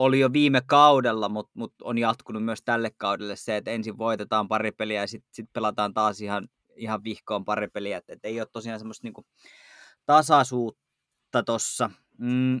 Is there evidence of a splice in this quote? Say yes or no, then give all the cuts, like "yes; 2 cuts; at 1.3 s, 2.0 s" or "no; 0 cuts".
no; 0 cuts